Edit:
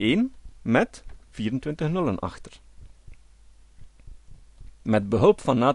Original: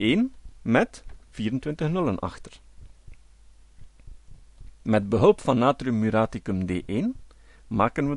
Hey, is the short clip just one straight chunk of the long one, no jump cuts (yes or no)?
yes